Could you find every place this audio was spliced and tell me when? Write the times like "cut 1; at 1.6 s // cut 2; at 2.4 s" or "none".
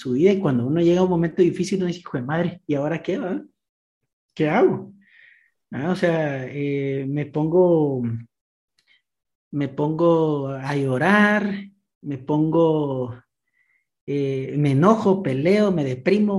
none